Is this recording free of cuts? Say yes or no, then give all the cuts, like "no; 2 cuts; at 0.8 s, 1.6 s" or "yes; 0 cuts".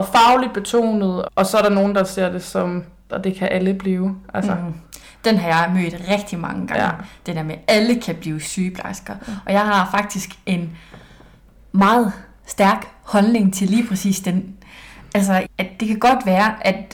no; 3 cuts; at 1.2 s, 3.1 s, 15.4 s